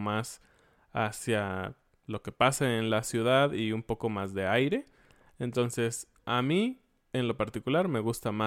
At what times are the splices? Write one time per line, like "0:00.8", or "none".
none